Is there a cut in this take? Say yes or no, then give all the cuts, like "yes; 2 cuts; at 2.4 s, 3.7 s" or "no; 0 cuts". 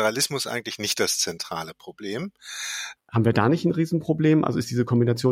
yes; 1 cut; at 3.0 s